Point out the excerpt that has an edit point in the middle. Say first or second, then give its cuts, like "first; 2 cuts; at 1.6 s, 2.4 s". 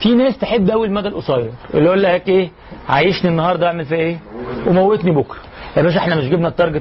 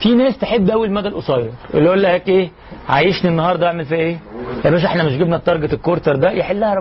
second; 1 cut; at 4.6 s